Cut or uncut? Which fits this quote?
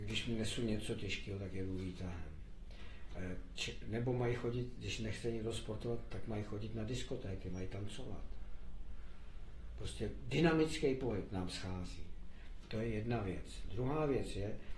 uncut